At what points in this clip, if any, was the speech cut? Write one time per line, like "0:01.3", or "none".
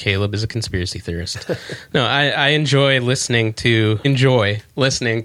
0:04.0